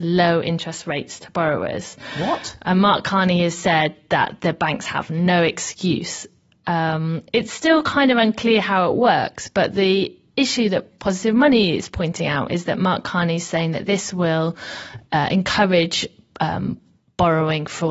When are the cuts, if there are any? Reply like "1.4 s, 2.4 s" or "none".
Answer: none